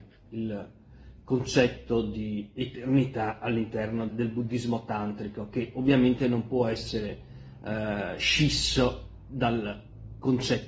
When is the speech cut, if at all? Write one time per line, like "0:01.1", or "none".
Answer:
0:04.1